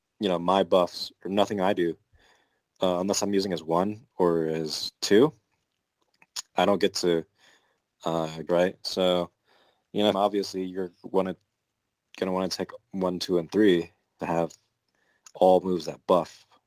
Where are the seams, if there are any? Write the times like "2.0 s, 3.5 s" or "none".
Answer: 8.5 s, 10.1 s, 14.2 s

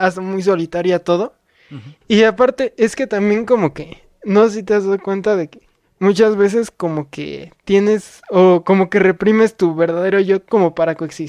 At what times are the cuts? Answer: 2.0 s

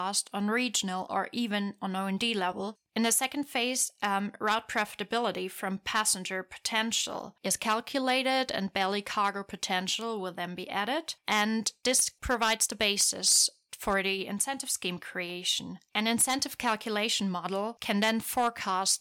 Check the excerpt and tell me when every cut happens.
none

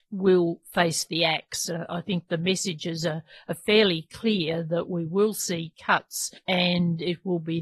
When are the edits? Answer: none

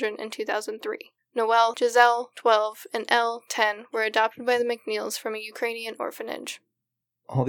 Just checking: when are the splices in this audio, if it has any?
1.7 s

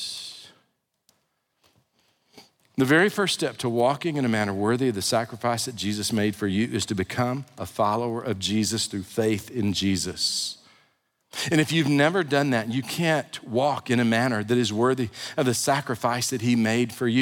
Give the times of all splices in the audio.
none

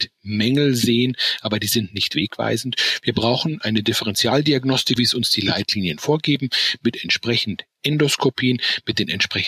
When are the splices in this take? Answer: 5.0 s

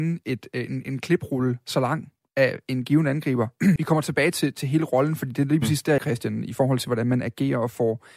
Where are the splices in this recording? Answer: 3.8 s, 6.0 s

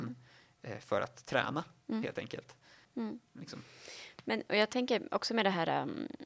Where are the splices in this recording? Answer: 2.8 s

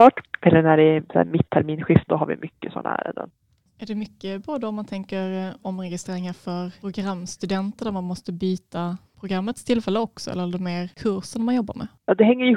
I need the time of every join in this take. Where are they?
2.1 s

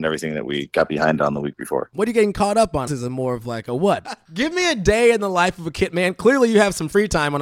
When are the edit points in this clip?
2.9 s, 4.0 s

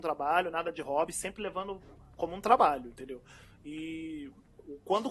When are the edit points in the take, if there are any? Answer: none

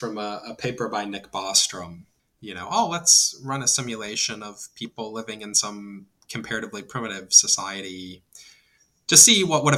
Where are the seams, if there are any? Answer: 2.2 s

